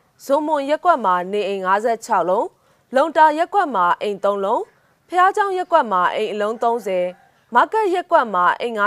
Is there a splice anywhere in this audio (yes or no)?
no